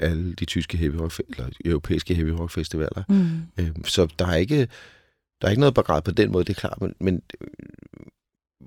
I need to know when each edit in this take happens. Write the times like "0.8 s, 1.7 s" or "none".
3.8 s